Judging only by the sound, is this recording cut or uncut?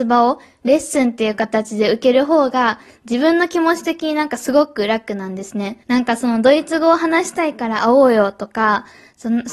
cut